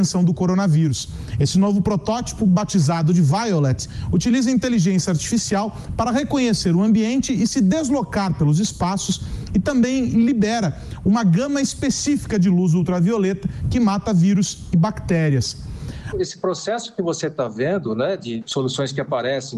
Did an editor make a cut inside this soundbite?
yes; 2 cuts; at 16.1 s, 18.4 s

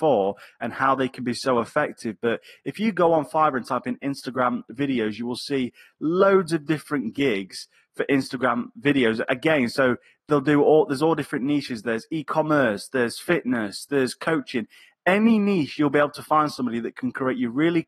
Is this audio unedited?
yes; 0 cuts

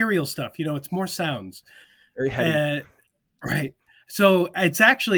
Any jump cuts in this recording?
no; 0 cuts

